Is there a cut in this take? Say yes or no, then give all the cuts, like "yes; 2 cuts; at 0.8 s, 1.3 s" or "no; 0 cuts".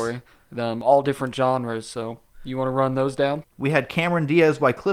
yes; 1 cut; at 3.4 s